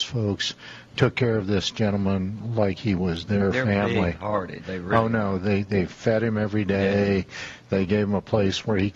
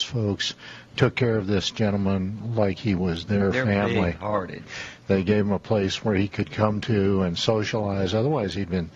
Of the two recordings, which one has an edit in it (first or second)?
second